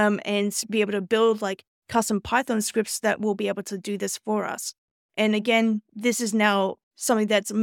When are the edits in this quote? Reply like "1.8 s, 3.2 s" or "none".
5.9 s